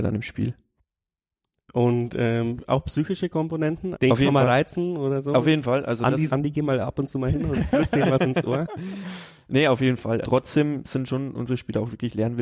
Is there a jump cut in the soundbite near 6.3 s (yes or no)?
yes